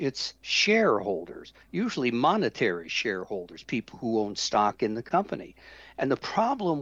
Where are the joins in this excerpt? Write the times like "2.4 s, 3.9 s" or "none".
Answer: none